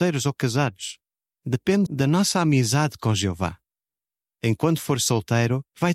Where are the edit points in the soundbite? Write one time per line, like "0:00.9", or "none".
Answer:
0:01.9